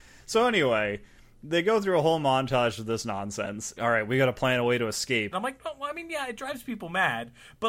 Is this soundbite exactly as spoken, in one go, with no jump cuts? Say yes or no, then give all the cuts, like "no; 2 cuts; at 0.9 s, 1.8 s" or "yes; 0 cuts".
no; 2 cuts; at 3.8 s, 5.3 s